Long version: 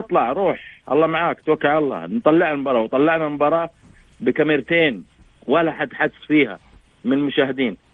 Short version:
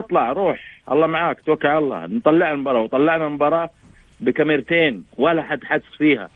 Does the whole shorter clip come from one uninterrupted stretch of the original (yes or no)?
no